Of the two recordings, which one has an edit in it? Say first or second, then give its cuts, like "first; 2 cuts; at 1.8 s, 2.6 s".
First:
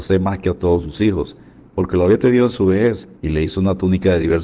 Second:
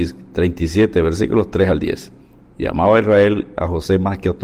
first; 1 cut; at 3.2 s